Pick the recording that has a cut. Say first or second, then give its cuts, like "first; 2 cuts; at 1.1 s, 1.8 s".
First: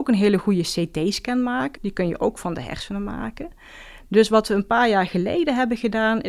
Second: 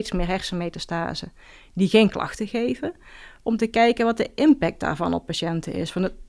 first; 1 cut; at 1.8 s